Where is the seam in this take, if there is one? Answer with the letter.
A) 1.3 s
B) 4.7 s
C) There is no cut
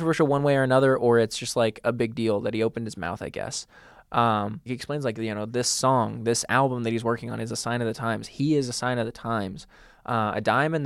B